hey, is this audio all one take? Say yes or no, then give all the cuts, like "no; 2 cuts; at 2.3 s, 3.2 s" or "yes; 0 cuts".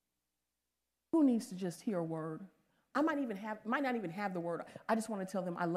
yes; 0 cuts